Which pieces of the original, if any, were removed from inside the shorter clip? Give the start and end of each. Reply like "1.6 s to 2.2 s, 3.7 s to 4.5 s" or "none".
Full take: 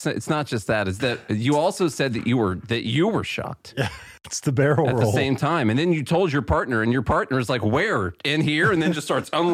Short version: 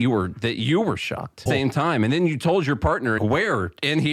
3.7 s to 5.1 s, 6.8 s to 7.6 s